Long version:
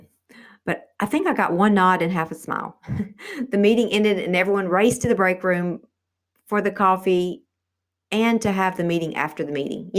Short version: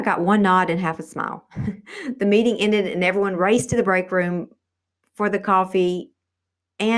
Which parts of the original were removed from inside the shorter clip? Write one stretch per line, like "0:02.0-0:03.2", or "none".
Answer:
none